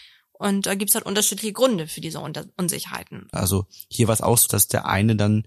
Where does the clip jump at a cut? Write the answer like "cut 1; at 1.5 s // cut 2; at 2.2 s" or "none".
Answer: cut 1; at 3.3 s // cut 2; at 4.5 s